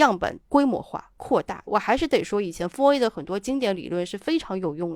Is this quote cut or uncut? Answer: uncut